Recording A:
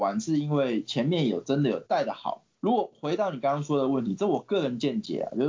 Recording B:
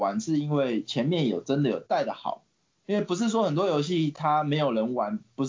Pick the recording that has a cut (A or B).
A